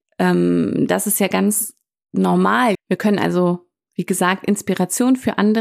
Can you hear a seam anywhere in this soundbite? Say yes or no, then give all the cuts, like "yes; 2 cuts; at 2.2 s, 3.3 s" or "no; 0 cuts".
yes; 1 cut; at 2.7 s